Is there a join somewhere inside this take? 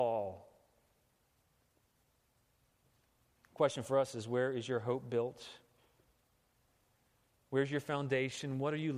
no; 0 cuts

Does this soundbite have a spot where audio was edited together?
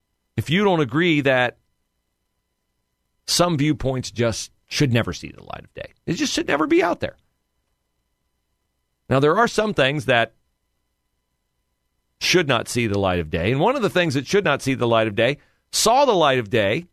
no; 0 cuts

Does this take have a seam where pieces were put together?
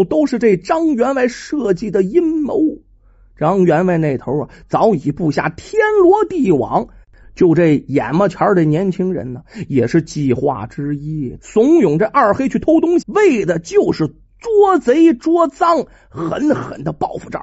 yes; 2 cuts; at 11.4 s, 13.0 s

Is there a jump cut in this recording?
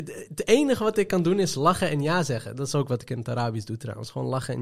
no; 0 cuts

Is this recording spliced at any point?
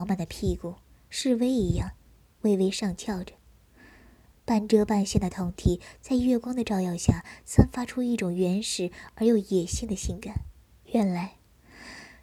yes; 1 cut; at 10.8 s

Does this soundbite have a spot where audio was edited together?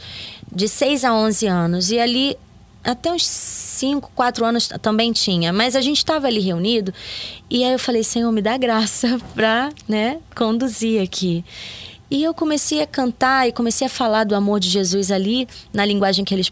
no; 0 cuts

